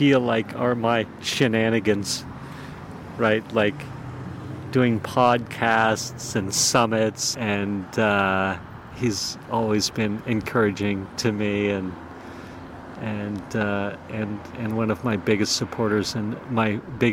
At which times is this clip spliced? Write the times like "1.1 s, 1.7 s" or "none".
7.3 s, 8.9 s